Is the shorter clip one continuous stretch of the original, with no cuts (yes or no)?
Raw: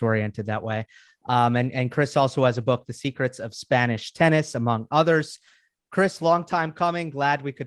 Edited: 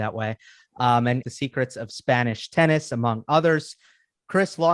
no